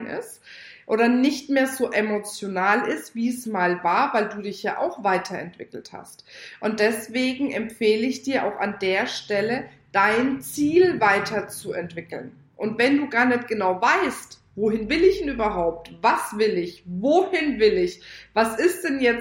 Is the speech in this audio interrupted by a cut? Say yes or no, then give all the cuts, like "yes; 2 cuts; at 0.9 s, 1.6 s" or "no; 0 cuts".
no; 0 cuts